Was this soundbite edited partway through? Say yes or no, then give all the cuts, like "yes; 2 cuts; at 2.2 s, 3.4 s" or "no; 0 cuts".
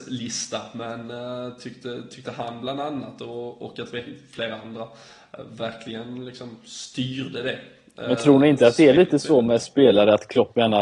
no; 0 cuts